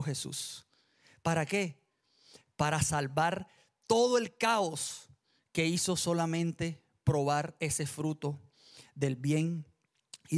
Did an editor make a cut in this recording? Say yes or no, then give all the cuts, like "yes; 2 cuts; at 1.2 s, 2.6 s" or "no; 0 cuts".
no; 0 cuts